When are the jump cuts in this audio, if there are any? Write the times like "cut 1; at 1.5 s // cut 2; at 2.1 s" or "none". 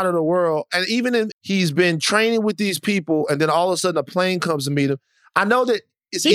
cut 1; at 1.3 s